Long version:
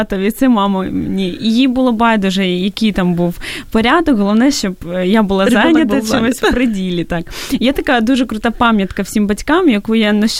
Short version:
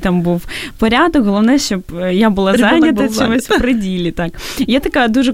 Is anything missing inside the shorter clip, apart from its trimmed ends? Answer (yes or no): no